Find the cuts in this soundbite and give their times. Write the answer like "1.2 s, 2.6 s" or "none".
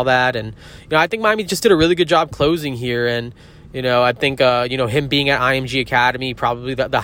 none